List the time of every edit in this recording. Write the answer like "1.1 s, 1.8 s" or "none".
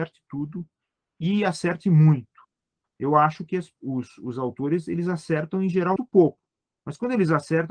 6.0 s